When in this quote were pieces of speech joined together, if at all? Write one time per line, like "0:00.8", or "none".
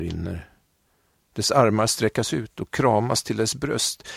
none